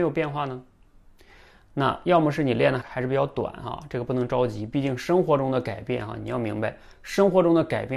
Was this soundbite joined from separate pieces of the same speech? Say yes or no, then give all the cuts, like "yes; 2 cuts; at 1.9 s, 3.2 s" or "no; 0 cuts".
yes; 1 cut; at 2.8 s